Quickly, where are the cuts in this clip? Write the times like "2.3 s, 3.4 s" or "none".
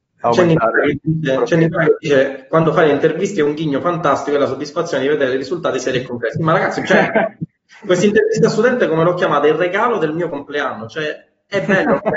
none